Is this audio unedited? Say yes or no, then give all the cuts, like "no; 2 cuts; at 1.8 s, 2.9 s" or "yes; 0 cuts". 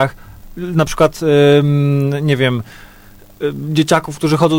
yes; 0 cuts